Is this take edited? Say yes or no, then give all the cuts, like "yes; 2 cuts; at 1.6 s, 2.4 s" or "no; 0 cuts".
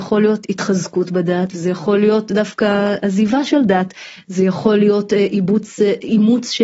no; 0 cuts